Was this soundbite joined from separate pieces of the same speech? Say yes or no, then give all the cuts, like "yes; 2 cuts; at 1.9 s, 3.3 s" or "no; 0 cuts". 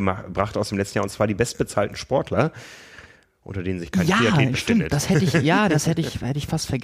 no; 0 cuts